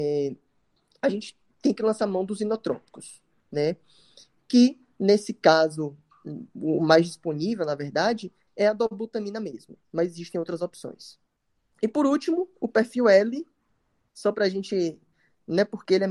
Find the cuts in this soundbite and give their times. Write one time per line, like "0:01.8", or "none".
none